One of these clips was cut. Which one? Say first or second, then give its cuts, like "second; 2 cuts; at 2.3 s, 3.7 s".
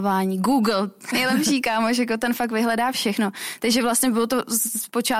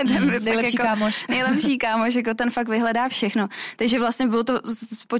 first; 1 cut; at 1.1 s